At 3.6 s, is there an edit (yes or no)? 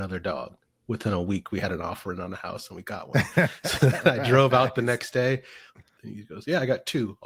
no